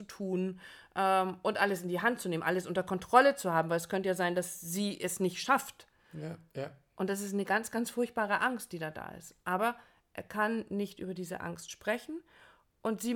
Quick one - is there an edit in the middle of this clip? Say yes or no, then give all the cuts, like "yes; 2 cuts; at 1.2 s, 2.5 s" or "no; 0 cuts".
no; 0 cuts